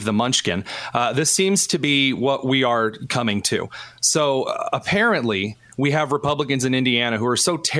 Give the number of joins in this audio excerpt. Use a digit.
0